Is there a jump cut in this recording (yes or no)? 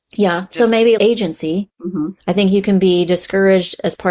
yes